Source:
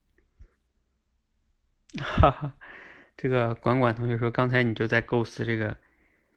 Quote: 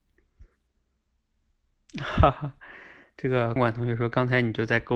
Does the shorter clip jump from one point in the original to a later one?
yes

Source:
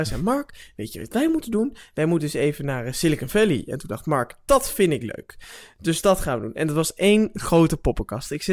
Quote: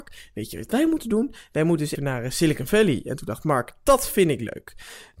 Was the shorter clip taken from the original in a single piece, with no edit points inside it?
no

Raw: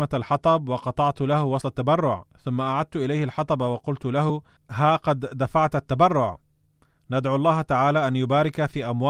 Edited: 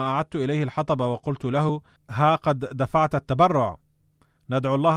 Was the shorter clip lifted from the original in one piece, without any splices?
yes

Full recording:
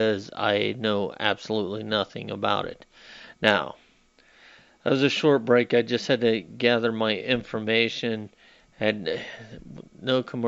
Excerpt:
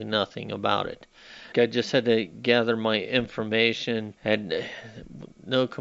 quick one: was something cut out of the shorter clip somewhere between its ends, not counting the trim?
yes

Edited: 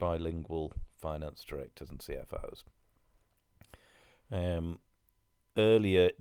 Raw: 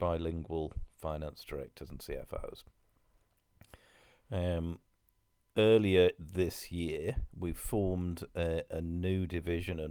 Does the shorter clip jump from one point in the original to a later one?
no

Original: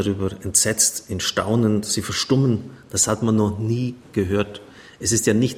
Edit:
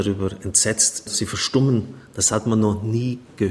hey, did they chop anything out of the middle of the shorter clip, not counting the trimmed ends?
yes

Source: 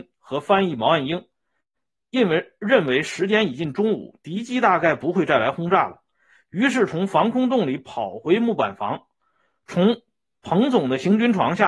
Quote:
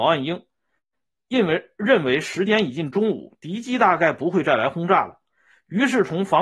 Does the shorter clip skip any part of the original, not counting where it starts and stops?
no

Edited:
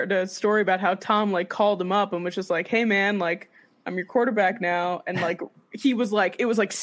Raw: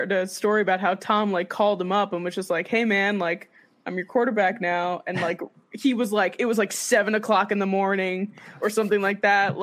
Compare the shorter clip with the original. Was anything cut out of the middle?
no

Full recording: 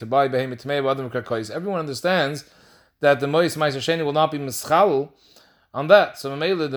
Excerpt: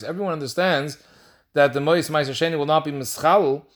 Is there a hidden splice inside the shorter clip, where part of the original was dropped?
no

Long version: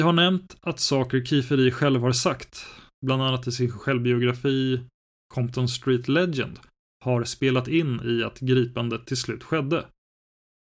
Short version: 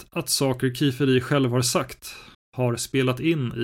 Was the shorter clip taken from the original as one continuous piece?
no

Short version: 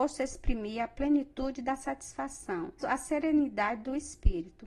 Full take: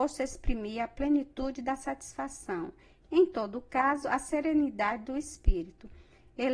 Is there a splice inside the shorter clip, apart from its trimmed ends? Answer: yes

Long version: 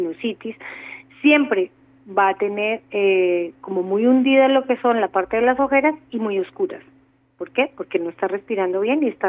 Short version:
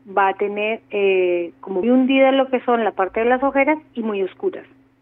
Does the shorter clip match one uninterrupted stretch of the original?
no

